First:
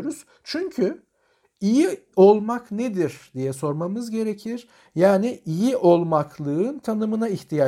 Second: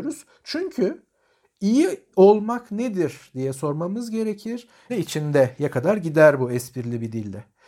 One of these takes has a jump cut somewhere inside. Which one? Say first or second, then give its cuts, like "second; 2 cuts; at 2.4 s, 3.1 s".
second; 1 cut; at 4.9 s